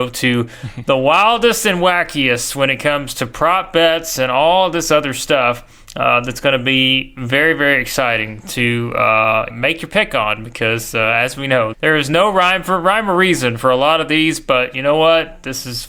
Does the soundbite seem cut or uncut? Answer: cut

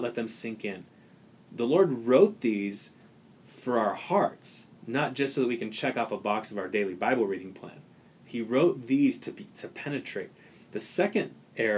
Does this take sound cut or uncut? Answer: cut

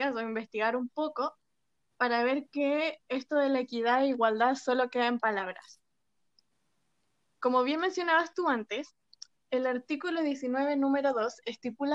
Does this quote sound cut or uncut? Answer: uncut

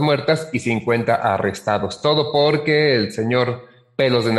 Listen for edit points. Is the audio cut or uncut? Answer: uncut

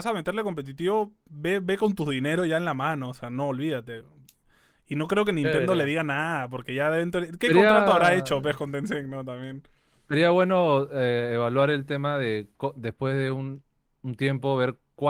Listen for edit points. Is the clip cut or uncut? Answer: uncut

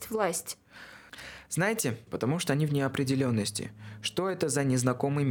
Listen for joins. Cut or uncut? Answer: cut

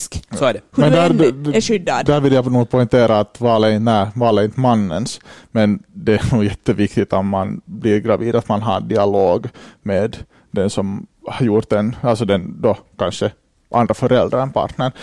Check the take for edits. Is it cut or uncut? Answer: uncut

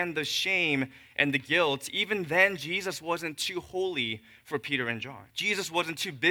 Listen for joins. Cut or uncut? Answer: cut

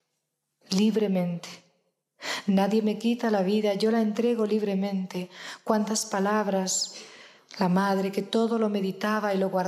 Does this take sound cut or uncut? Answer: uncut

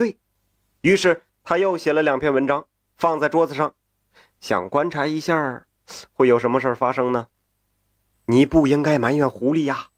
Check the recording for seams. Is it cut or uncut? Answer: cut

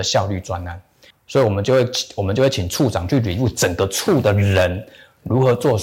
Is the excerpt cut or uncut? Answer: cut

